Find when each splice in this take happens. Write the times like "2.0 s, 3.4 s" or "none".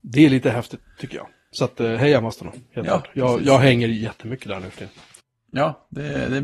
1.8 s